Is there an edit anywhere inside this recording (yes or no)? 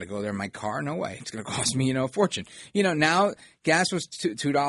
no